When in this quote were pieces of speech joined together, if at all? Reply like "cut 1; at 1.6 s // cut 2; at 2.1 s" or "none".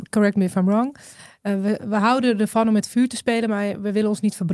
none